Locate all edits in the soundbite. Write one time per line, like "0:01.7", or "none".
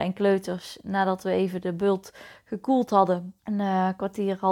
0:03.4